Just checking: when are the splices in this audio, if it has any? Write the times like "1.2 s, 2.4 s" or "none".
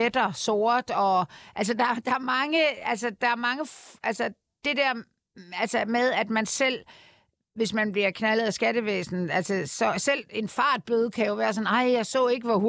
none